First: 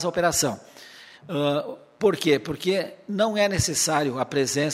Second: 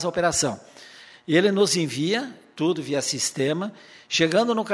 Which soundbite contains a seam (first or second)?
first